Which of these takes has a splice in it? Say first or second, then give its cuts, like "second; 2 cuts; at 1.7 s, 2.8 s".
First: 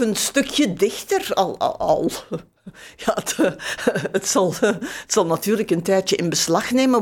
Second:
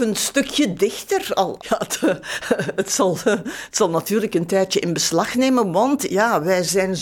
second; 1 cut; at 1.6 s